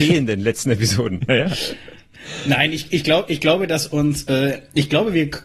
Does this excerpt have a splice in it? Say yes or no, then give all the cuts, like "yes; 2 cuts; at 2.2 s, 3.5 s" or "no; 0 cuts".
no; 0 cuts